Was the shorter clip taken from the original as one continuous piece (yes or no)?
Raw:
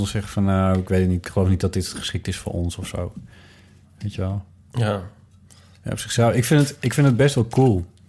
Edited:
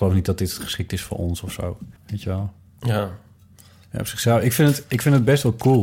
no